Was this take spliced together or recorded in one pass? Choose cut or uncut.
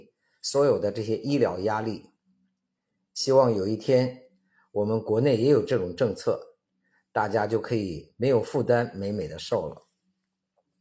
uncut